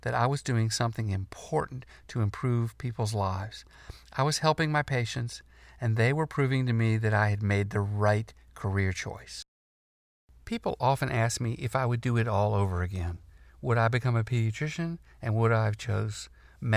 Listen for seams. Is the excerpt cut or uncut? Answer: uncut